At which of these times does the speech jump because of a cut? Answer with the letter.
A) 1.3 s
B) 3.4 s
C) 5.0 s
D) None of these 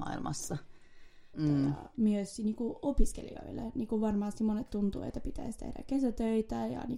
A